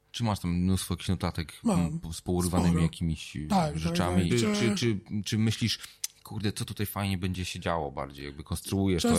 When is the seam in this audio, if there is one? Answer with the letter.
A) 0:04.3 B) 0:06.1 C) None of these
A